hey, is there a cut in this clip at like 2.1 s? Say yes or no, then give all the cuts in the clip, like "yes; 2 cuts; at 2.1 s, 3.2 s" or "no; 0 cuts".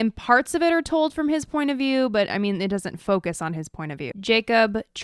no; 1 cut; at 4.1 s